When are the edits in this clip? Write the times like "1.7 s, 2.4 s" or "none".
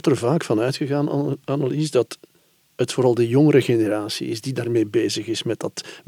none